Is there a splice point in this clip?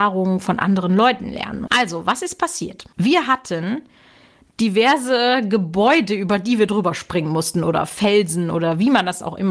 yes; 1 cut; at 1.7 s

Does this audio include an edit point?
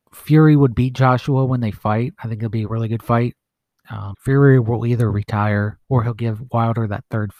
yes; 2 cuts; at 4.1 s, 5.8 s

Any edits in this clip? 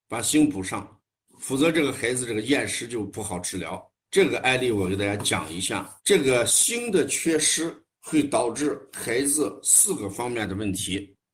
yes; 3 cuts; at 4.0 s, 6.0 s, 7.9 s

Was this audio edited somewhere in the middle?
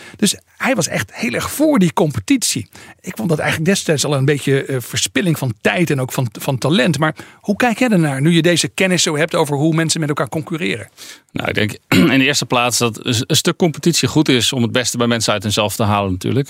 no; 0 cuts

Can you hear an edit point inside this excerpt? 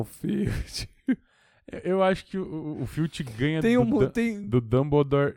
no; 0 cuts

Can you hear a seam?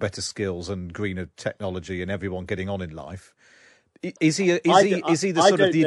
yes; 1 cut; at 4.2 s

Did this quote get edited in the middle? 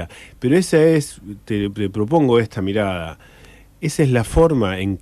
no; 0 cuts

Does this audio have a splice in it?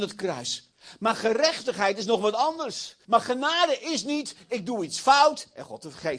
yes; 1 cut; at 3.0 s

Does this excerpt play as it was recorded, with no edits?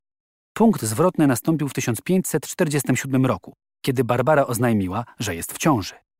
yes; 0 cuts

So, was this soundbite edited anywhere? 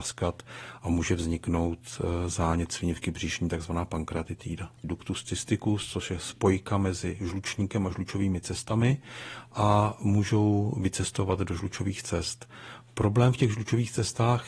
yes; 1 cut; at 4.8 s

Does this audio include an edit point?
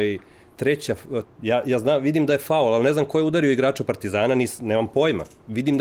yes; 1 cut; at 1.2 s

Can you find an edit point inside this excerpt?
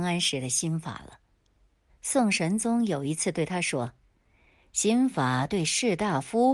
yes; 1 cut; at 1.9 s

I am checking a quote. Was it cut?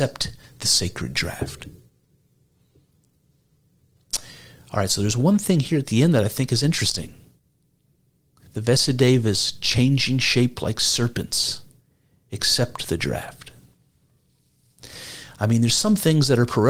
no; 0 cuts

